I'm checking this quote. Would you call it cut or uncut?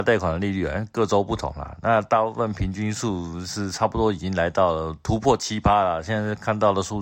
uncut